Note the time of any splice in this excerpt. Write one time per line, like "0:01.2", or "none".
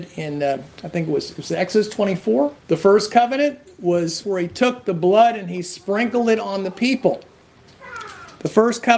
0:02.6
0:04.2